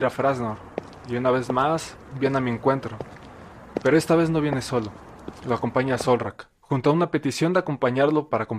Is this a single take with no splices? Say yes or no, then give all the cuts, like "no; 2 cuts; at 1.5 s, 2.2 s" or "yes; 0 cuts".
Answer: no; 1 cut; at 6.6 s